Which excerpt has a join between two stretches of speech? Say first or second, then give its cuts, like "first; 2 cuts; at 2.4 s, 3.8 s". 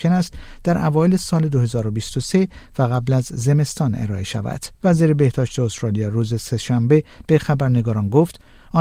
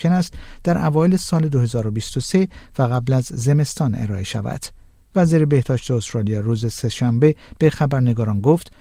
first; 1 cut; at 4.7 s